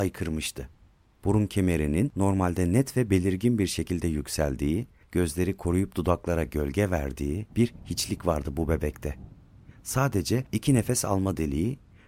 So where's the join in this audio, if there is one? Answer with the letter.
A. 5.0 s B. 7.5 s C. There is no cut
B